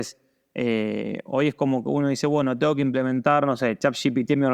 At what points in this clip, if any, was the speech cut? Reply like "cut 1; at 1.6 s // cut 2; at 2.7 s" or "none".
none